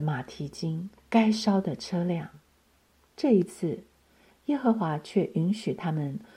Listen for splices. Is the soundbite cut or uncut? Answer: cut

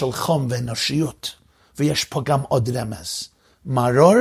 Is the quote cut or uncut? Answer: uncut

